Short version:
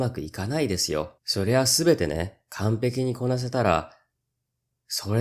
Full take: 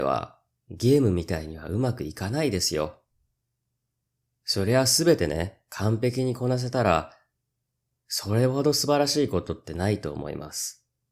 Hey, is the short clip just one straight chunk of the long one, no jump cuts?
no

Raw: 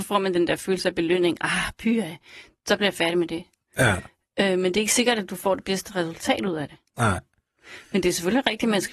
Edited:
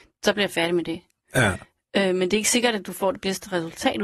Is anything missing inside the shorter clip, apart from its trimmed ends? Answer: no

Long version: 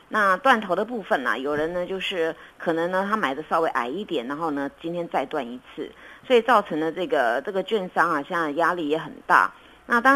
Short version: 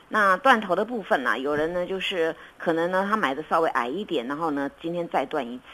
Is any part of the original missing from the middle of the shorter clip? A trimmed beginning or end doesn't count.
no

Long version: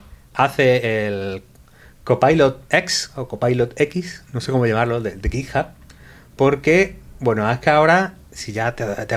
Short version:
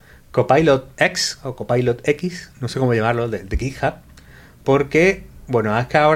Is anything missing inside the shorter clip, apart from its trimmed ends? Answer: no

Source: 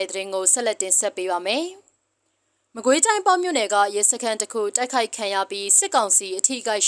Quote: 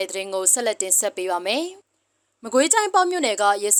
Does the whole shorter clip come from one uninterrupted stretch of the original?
no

